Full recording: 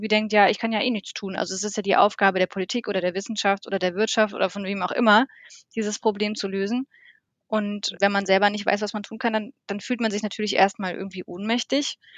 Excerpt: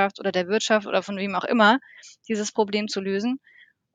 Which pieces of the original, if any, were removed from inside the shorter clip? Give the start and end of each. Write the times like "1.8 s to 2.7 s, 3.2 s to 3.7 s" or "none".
none